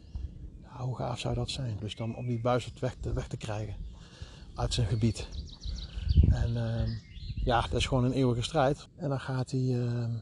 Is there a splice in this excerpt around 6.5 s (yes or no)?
no